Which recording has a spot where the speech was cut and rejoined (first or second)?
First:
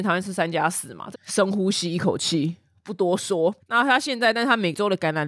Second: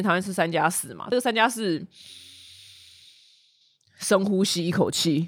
first